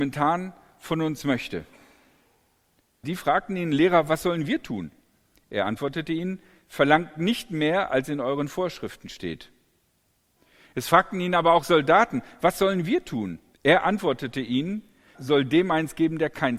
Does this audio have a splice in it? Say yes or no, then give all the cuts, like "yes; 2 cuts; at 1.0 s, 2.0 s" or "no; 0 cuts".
yes; 3 cuts; at 3.0 s, 13.5 s, 15.1 s